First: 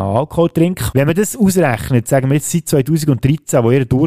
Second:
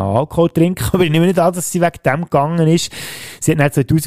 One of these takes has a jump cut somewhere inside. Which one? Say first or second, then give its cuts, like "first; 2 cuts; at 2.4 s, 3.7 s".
first; 1 cut; at 0.9 s